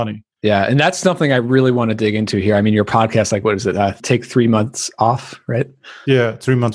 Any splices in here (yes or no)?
no